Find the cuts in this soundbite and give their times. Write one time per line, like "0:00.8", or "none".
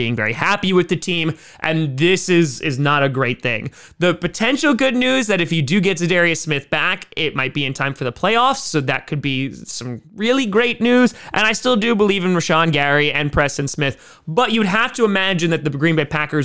none

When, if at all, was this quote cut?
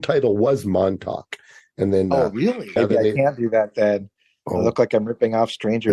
0:02.8

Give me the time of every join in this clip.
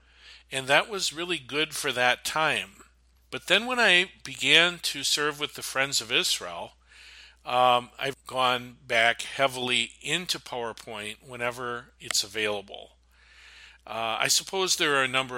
0:08.1

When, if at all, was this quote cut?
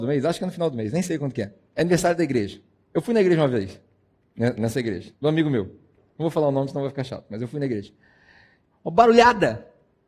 0:08.7

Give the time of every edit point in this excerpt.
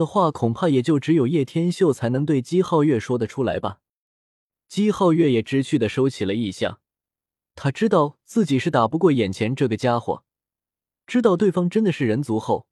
none

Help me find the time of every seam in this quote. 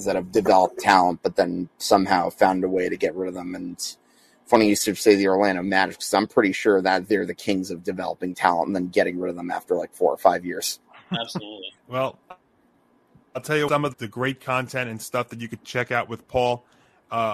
0:11.8
0:13.9

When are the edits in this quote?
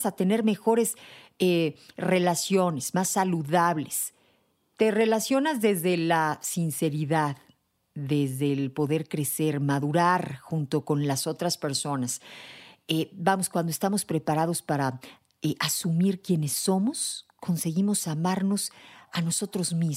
none

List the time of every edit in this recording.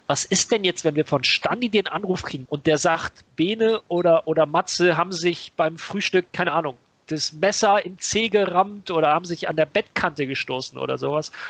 0:02.5

